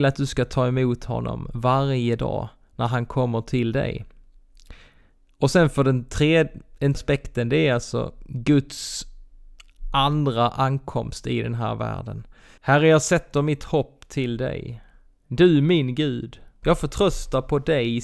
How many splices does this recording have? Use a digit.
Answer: 2